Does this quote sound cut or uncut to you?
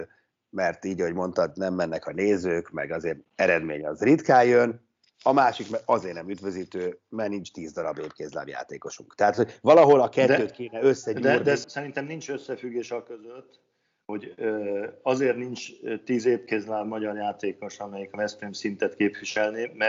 cut